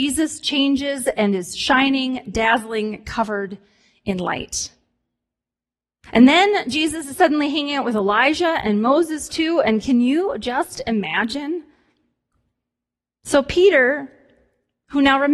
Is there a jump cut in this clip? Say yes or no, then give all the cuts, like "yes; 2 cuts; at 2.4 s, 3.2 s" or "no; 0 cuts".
no; 0 cuts